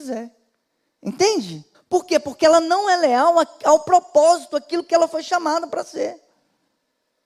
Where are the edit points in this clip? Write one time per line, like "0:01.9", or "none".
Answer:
0:01.7